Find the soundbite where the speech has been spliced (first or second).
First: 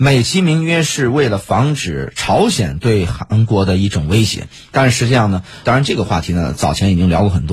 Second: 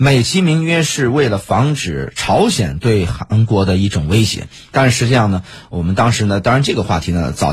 first